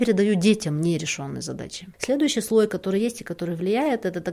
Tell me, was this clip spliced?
yes; 1 cut; at 1.9 s

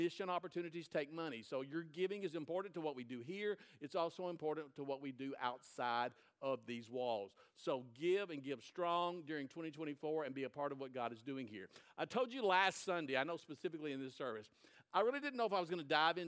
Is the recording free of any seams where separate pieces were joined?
yes; 0 cuts

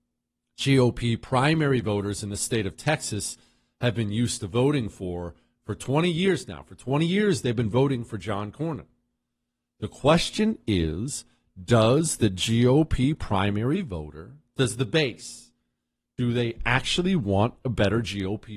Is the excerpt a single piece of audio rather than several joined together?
yes; 0 cuts

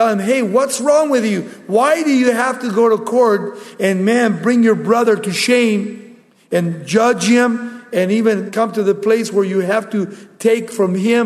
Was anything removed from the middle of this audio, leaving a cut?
no; 0 cuts

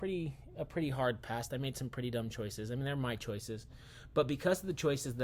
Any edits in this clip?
no; 0 cuts

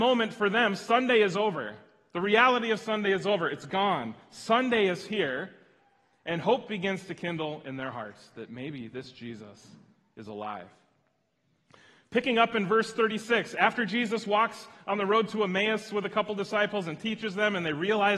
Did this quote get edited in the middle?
no; 0 cuts

